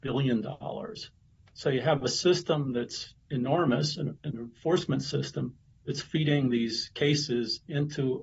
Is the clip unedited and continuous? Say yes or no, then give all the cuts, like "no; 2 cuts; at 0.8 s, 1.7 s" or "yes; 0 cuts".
no; 1 cut; at 4.2 s